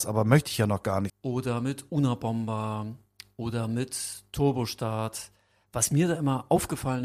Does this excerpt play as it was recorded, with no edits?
no; 1 cut; at 1.1 s

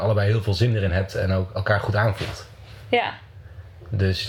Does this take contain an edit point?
no; 0 cuts

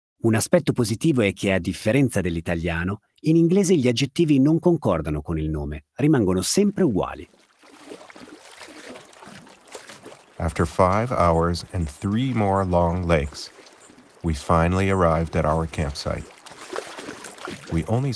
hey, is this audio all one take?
yes; 0 cuts

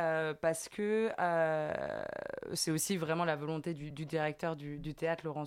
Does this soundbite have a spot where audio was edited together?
no; 0 cuts

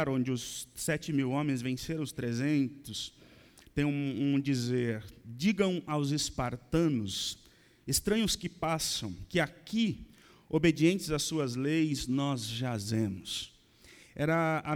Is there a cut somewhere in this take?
no; 0 cuts

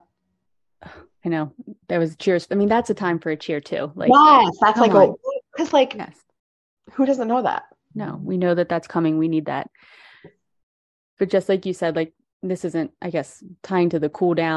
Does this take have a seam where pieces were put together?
no; 0 cuts

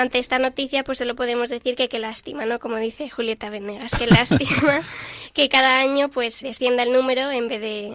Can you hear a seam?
yes; 1 cut; at 6.4 s

